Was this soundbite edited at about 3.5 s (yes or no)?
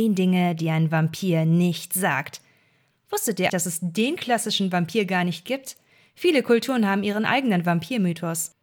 yes